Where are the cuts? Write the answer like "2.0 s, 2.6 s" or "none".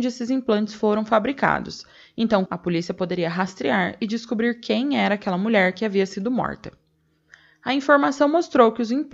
2.5 s